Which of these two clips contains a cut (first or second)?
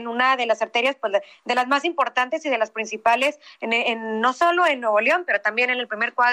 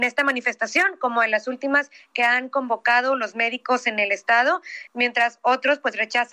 second